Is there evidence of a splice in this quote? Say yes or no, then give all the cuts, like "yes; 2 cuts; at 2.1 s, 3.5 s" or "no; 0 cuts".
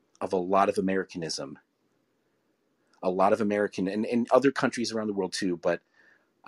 no; 0 cuts